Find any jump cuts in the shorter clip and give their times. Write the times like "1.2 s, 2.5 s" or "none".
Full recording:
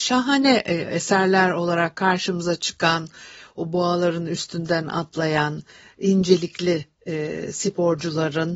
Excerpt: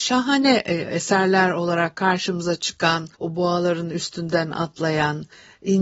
3.1 s